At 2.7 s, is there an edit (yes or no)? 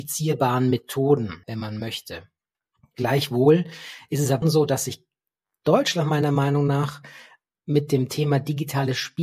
no